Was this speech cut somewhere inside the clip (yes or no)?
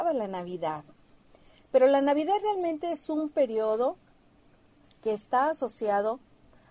no